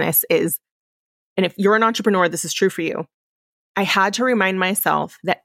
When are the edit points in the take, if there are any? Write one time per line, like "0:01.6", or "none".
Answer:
none